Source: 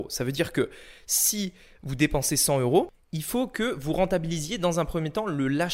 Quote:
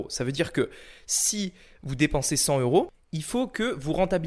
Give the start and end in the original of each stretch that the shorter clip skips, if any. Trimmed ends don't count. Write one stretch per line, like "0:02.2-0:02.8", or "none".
none